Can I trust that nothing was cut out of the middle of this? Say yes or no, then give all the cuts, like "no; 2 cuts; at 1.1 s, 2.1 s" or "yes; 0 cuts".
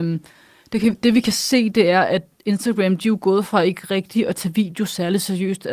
yes; 0 cuts